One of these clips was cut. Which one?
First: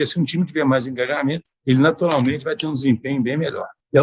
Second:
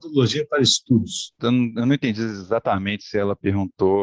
second; 1 cut; at 1.4 s

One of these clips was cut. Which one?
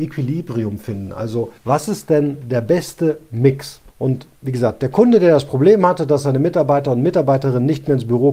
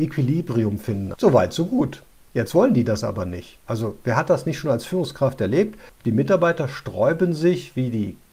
second; 1 cut; at 1.1 s

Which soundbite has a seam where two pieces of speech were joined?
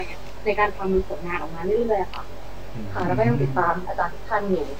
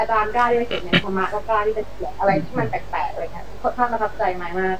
second; 1 cut; at 1.0 s

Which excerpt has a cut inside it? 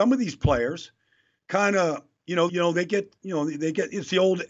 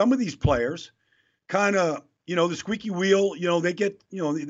first; 1 cut; at 2.5 s

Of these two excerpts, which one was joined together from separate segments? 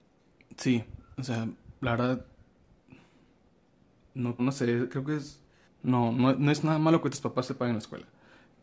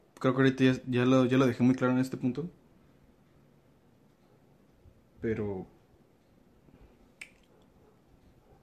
first; 2 cuts; at 4.4 s, 5.6 s

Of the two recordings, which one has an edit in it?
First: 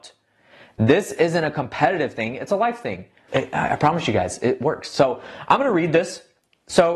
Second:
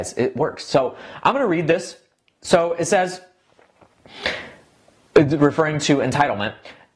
first; 1 cut; at 3.3 s

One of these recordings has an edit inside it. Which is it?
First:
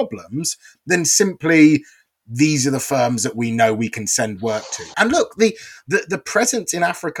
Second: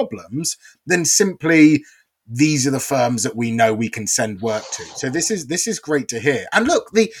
first; 1 cut; at 4.9 s

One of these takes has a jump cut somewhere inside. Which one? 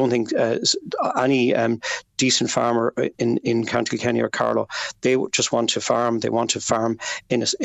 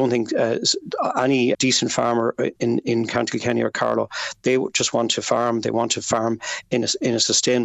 second; 1 cut; at 1.5 s

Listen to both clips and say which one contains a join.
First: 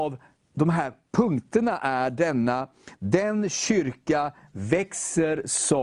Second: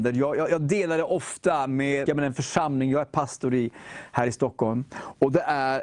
second; 1 cut; at 2.1 s

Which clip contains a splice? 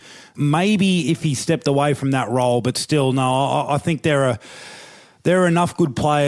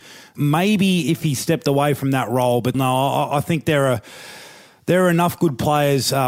second; 1 cut; at 2.7 s

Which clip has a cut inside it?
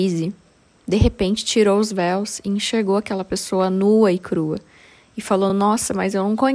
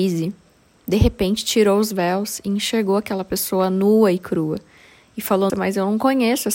second; 1 cut; at 5.5 s

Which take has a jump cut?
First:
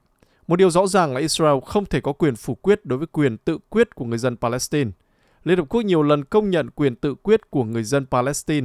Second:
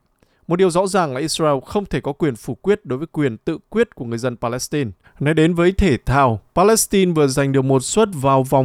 second; 2 cuts; at 5.0 s, 6.5 s

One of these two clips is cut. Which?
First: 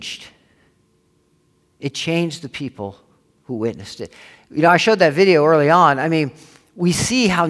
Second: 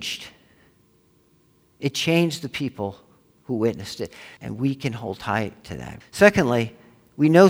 second; 2 cuts; at 4.4 s, 6.0 s

